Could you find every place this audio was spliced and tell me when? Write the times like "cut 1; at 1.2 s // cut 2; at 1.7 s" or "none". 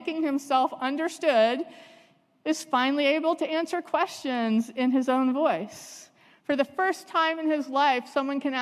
none